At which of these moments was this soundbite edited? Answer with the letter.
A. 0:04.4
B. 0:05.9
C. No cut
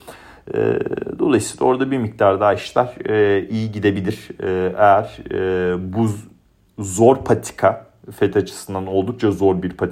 C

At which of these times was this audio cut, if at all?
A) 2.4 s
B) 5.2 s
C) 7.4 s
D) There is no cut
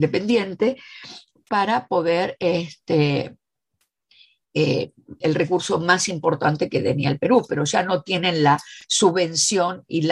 B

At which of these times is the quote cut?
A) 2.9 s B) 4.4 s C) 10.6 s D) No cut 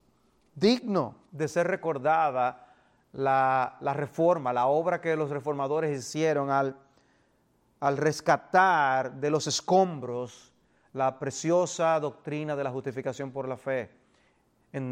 D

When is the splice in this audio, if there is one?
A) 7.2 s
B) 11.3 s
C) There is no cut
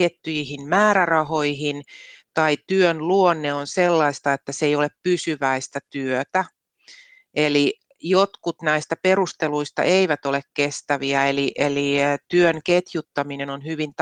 C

